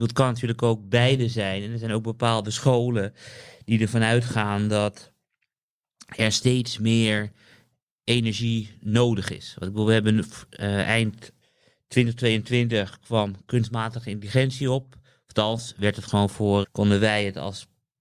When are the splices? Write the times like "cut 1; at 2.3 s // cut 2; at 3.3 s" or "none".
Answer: cut 1; at 16.6 s